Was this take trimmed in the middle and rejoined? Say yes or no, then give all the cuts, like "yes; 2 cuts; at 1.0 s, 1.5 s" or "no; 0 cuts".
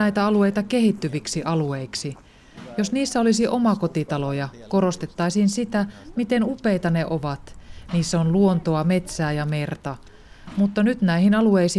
no; 0 cuts